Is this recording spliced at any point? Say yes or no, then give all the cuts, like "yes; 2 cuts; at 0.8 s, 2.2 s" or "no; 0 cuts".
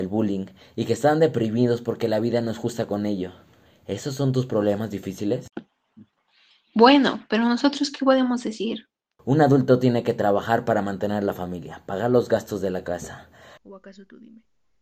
yes; 2 cuts; at 9.2 s, 13.6 s